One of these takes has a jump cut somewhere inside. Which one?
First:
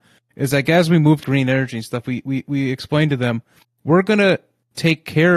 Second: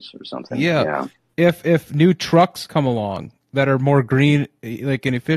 first; 1 cut; at 1.2 s

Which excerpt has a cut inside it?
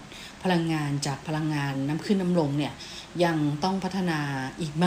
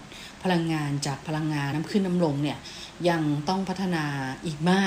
second; 1 cut; at 1.7 s

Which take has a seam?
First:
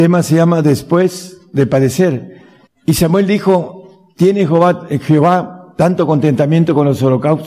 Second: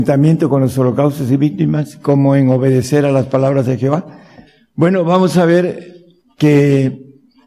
first; 1 cut; at 2.7 s

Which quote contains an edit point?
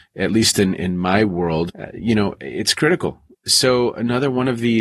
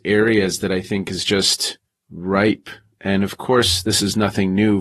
first; 2 cuts; at 1.7 s, 3.3 s

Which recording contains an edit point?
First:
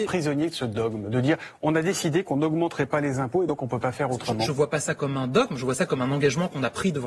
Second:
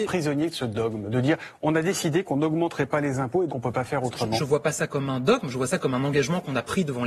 second; 1 cut; at 3.5 s

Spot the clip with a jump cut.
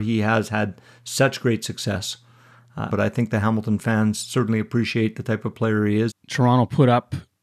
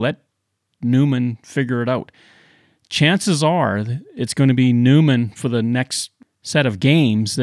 first; 2 cuts; at 2.9 s, 6.1 s

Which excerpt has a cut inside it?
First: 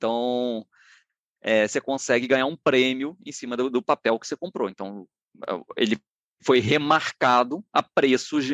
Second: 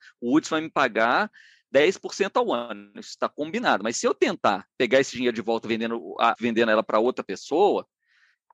second; 1 cut; at 6.4 s

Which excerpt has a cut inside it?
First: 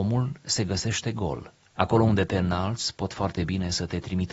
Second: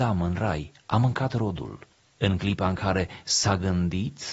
first; 1 cut; at 1.7 s

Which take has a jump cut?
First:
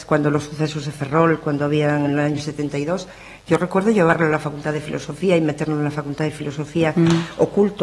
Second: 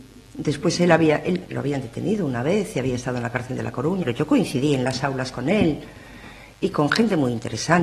second; 2 cuts; at 1.4 s, 4.0 s

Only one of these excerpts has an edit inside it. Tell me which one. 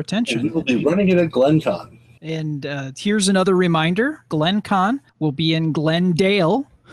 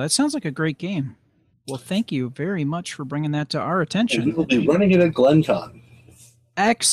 first; 2 cuts; at 2.2 s, 5.1 s

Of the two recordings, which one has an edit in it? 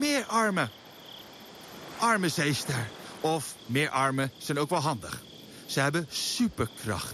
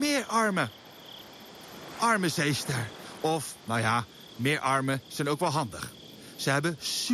first; 1 cut; at 3.6 s

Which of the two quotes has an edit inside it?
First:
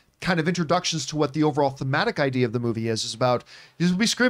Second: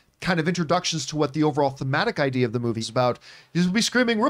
second; 1 cut; at 2.8 s

